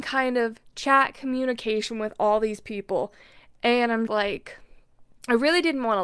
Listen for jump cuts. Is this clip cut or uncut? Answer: cut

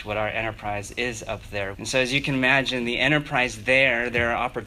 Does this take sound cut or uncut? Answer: cut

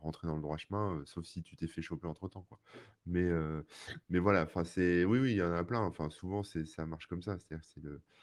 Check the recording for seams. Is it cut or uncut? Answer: uncut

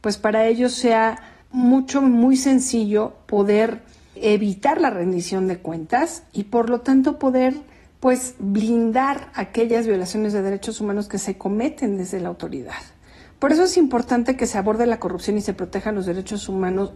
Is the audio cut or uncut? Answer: uncut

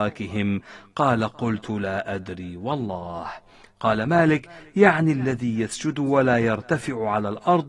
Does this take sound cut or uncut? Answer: uncut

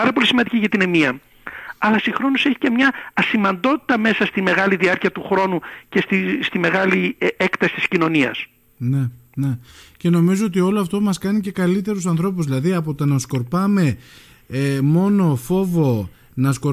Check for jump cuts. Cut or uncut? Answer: uncut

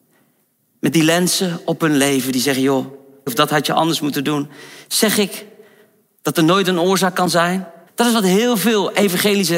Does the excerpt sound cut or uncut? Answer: cut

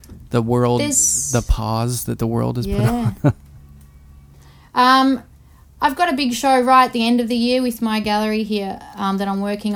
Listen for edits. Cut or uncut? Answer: uncut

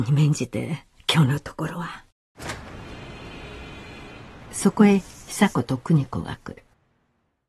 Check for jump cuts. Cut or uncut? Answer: cut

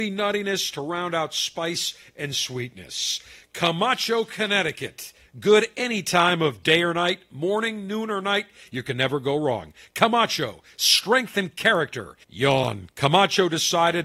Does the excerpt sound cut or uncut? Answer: cut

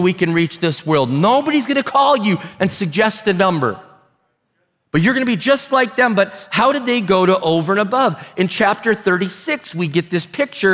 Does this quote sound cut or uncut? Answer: uncut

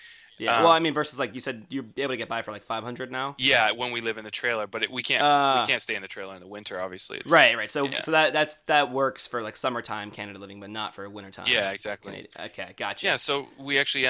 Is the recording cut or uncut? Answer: uncut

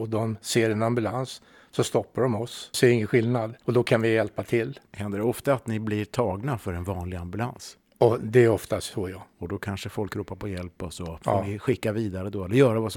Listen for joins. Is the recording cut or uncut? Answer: cut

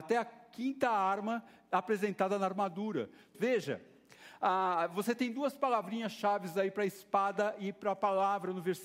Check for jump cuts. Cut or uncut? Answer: cut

